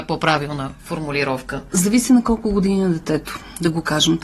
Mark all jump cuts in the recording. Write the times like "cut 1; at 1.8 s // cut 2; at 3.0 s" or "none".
none